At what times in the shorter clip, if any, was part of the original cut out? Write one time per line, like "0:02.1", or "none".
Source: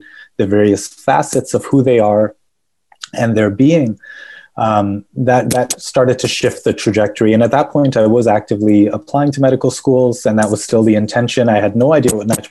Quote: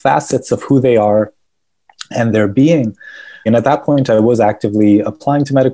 0:03.5